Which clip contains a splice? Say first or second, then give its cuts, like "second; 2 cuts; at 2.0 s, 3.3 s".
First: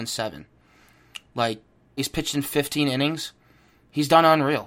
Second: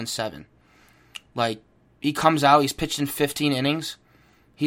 first; 1 cut; at 2.0 s